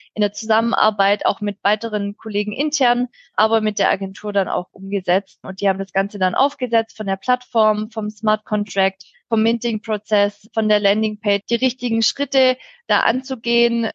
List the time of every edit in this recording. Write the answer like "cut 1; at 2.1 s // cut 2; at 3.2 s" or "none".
cut 1; at 11.4 s